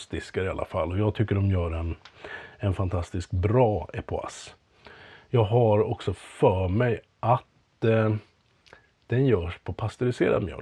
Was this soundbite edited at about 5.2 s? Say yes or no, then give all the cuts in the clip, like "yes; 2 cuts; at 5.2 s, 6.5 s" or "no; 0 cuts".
no; 0 cuts